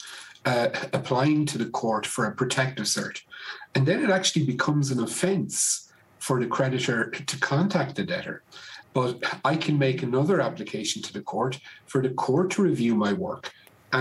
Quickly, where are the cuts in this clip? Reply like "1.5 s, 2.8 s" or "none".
8.8 s